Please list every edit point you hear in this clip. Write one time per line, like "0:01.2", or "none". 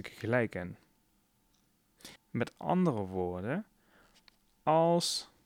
0:02.2